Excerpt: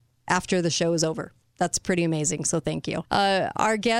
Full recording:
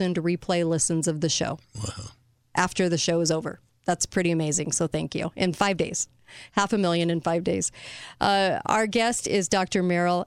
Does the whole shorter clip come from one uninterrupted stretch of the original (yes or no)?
no